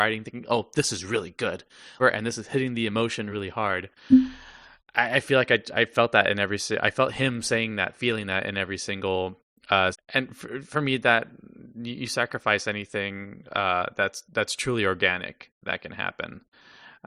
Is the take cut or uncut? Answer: cut